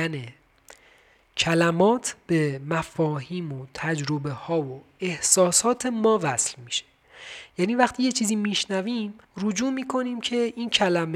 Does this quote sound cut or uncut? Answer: cut